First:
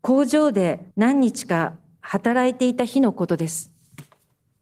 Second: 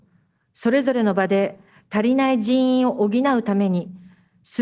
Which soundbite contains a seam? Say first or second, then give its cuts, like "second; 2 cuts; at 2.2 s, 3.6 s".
first; 1 cut; at 0.9 s